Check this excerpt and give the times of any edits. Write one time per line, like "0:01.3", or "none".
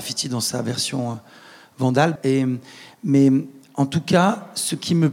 0:02.2